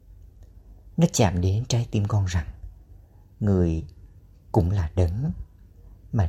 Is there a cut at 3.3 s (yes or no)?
no